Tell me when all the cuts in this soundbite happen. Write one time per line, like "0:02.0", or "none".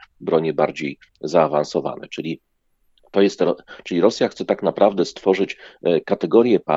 none